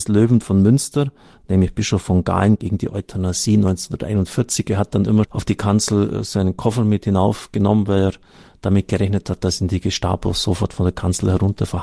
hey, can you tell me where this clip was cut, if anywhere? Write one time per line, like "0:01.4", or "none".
0:05.2

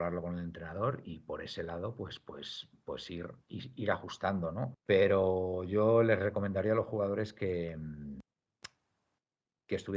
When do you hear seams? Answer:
0:04.7

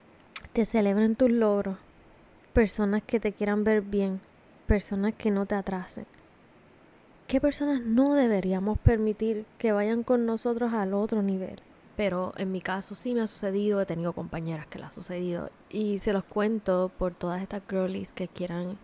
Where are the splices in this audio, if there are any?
0:11.8
0:15.5

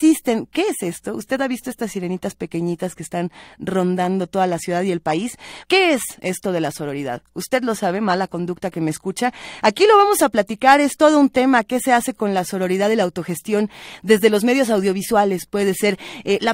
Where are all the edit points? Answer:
0:05.6

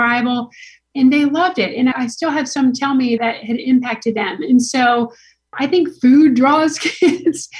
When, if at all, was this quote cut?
0:01.9
0:03.2

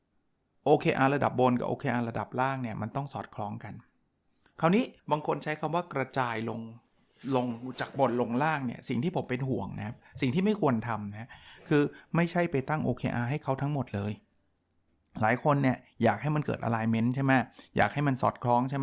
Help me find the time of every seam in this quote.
0:05.0

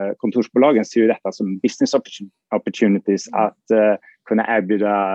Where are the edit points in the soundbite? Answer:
none

